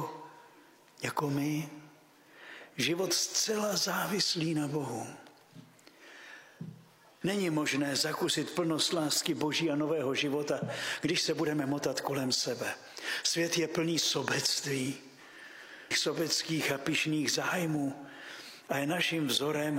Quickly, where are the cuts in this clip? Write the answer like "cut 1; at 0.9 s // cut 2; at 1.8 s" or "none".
cut 1; at 7.2 s // cut 2; at 15.9 s